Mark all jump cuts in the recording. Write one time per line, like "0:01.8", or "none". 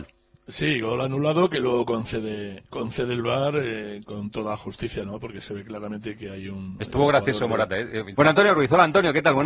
0:08.1